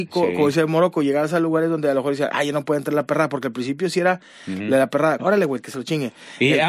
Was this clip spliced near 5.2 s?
yes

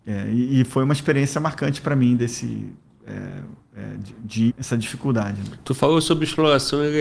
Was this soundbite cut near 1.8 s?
no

